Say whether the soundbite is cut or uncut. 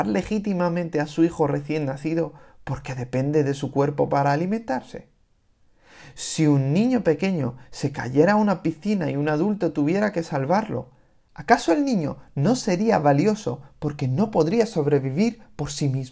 uncut